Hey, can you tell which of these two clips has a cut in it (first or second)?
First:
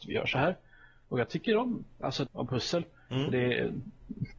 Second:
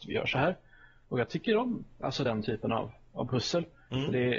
first